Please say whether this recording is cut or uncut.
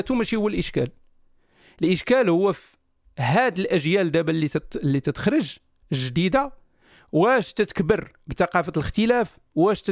uncut